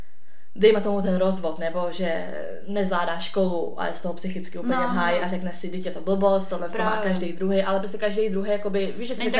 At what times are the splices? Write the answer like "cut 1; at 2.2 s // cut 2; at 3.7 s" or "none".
none